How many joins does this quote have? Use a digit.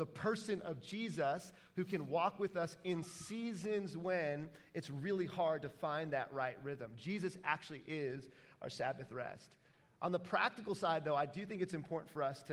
0